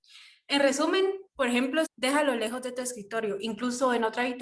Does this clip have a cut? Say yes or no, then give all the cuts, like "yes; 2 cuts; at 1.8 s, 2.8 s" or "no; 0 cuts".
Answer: yes; 1 cut; at 1.8 s